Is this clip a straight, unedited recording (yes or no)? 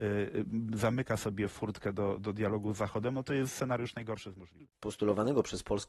no